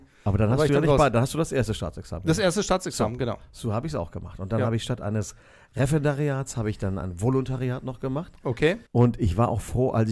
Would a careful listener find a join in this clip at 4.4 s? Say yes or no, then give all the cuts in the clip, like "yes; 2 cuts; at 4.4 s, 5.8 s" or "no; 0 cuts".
no; 1 cut; at 8.9 s